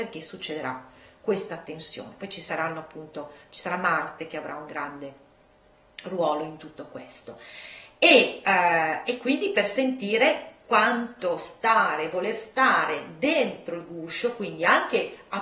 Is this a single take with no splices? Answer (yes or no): yes